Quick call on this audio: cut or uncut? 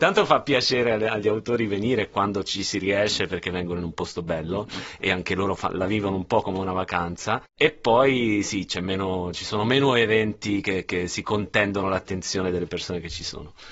uncut